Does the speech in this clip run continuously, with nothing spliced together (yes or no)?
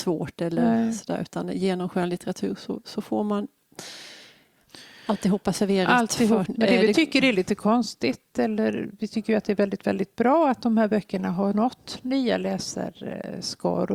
no